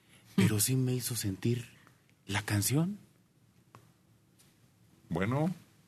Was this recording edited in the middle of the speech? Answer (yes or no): no